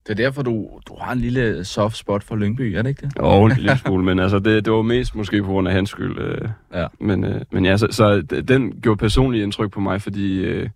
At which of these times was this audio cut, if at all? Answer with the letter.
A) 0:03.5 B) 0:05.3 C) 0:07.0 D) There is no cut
A